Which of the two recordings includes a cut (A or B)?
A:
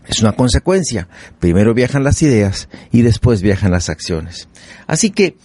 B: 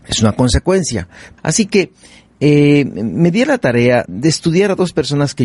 B